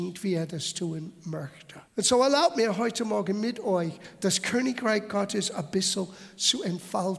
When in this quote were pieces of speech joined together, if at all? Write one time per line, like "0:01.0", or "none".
0:01.9